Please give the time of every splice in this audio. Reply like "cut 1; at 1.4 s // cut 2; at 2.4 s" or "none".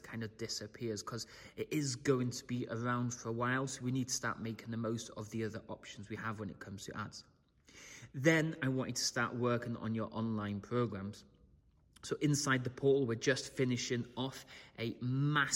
none